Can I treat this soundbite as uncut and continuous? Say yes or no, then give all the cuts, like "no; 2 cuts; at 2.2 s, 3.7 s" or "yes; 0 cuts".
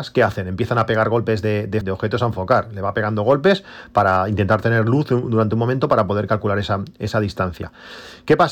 no; 1 cut; at 1.8 s